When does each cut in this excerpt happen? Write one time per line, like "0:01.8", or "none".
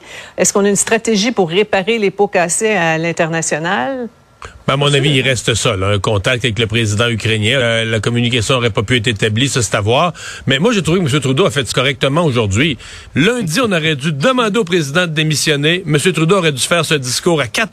0:07.6
0:11.7
0:13.1